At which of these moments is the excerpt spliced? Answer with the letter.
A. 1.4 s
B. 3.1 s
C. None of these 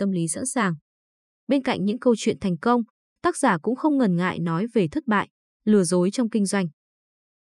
A